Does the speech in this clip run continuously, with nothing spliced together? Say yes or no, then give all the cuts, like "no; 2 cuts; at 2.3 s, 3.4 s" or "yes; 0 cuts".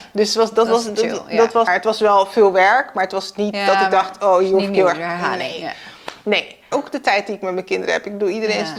no; 2 cuts; at 1.7 s, 6.7 s